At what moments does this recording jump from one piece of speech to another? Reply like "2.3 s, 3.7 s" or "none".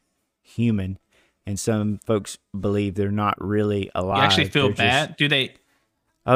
none